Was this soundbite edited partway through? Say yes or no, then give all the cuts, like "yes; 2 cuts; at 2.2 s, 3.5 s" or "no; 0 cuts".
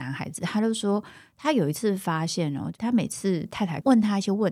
no; 0 cuts